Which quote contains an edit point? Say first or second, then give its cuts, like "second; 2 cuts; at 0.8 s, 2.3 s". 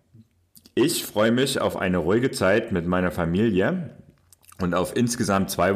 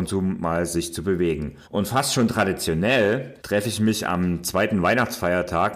second; 2 cuts; at 1.6 s, 3.4 s